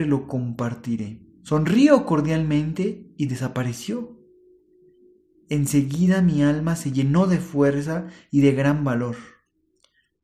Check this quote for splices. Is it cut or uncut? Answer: cut